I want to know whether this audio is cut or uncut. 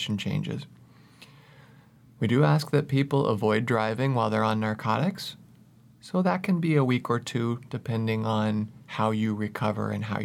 uncut